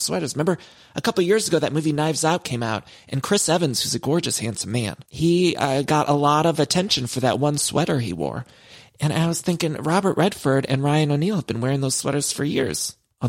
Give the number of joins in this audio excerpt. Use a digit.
1